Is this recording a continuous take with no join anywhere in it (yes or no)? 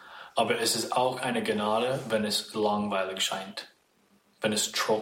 yes